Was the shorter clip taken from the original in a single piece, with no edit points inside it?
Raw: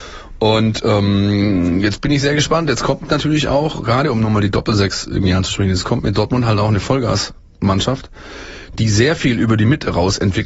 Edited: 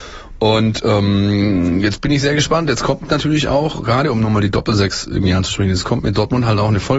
yes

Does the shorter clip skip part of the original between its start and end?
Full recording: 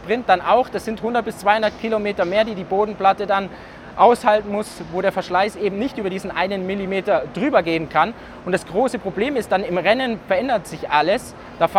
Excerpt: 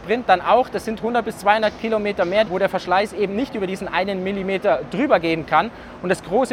yes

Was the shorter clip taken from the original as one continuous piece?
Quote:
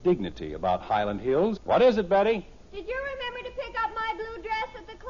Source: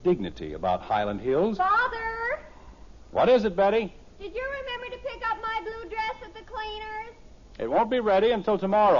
no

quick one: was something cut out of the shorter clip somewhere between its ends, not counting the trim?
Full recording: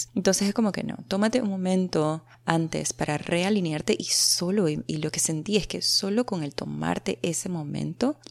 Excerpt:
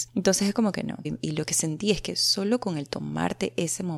yes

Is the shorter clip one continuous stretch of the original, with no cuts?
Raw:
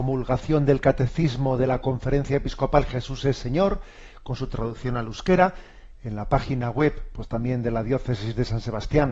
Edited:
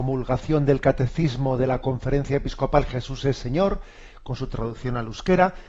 yes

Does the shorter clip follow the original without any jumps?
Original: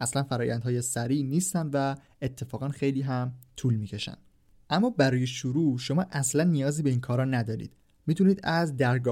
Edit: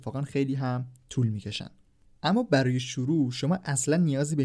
yes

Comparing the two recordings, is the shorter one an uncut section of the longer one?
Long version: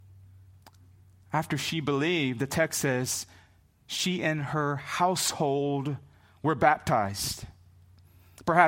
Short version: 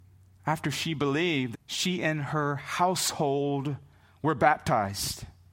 no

